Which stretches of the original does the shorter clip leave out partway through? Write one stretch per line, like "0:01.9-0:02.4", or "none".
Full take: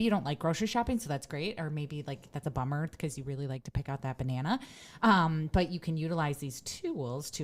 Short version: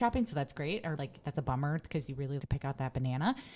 0:01.7-0:02.0
0:03.5-0:03.6